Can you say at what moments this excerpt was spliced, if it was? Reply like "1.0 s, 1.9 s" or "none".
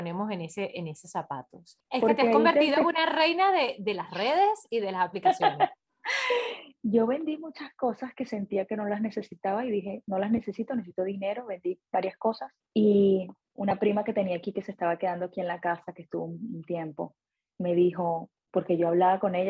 1.8 s